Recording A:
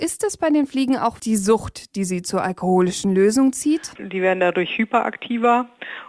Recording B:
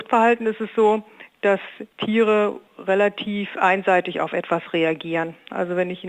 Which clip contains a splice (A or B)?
A